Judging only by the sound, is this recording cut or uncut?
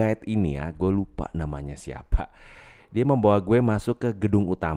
uncut